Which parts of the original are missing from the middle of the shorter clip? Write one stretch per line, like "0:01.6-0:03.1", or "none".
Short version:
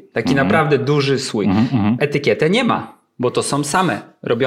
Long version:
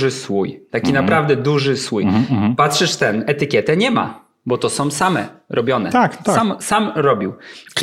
0:02.6-0:03.3